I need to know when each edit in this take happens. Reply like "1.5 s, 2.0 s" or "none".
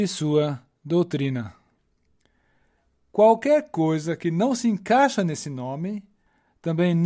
none